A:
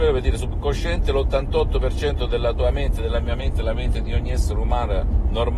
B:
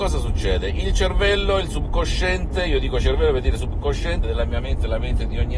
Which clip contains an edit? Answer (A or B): B